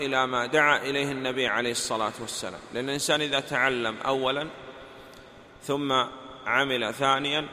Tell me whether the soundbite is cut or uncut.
uncut